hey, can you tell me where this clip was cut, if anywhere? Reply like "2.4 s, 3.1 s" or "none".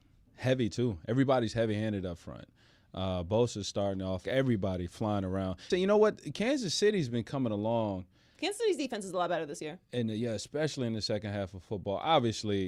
4.2 s, 5.7 s